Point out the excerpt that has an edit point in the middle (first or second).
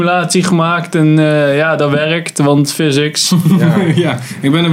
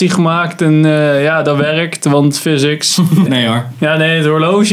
second